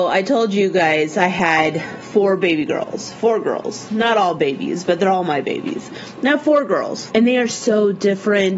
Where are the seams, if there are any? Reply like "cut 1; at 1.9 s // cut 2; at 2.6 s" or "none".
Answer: cut 1; at 7.1 s